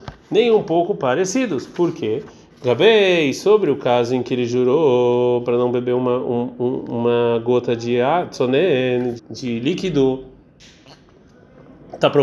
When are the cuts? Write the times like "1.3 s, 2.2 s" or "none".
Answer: 9.2 s